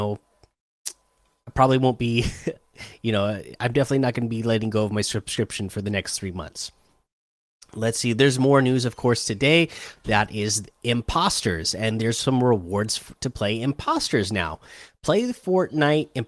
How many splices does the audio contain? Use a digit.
1